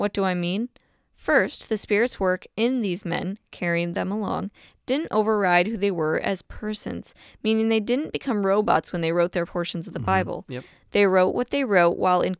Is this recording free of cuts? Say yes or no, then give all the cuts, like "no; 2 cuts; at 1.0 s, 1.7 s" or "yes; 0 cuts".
yes; 0 cuts